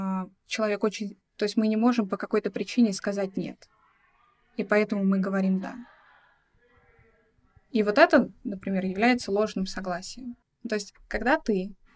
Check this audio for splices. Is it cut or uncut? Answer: cut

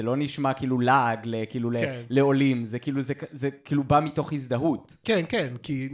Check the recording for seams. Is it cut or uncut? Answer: uncut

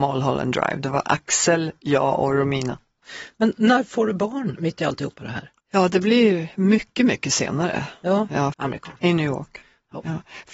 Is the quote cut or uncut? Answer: cut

